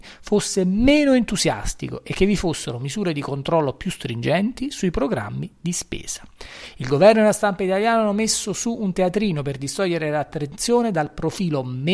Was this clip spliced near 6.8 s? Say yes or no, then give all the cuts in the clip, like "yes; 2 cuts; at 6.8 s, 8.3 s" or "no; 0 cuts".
no; 0 cuts